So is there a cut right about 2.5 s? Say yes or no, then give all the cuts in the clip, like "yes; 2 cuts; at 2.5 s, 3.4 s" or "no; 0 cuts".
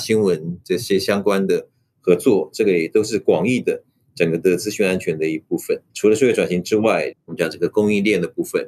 no; 2 cuts; at 5.9 s, 7.1 s